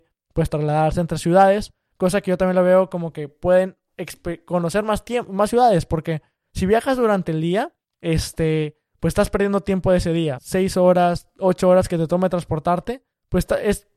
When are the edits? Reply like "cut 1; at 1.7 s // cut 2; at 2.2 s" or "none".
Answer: cut 1; at 10.4 s